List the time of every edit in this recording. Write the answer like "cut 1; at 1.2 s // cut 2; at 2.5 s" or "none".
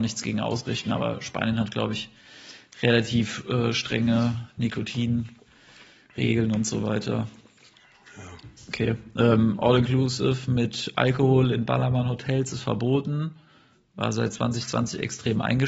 none